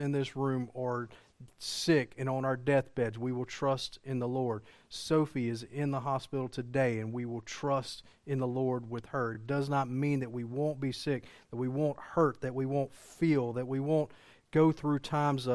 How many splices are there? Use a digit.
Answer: 0